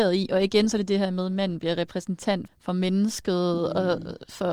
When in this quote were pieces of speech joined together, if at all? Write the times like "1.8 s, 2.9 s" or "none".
2.5 s